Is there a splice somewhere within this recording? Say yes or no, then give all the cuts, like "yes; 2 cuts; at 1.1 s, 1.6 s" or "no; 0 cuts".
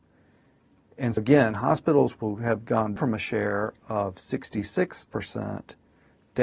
yes; 2 cuts; at 1.2 s, 3.0 s